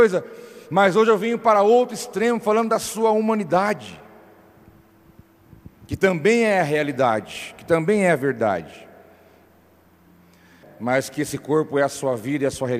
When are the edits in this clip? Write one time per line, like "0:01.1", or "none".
0:10.6